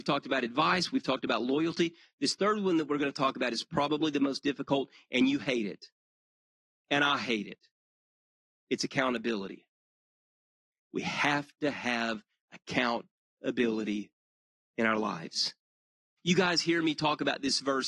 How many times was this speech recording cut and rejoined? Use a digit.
1